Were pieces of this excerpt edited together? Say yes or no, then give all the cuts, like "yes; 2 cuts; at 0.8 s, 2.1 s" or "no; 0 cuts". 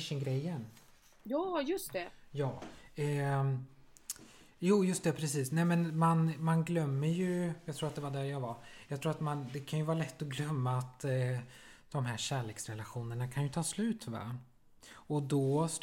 no; 0 cuts